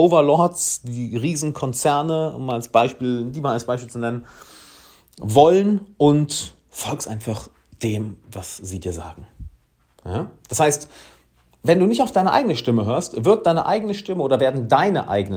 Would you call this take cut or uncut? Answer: uncut